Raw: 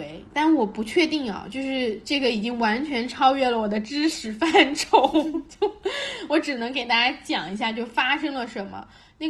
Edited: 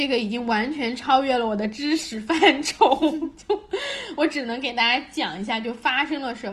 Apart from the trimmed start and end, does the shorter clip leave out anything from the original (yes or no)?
no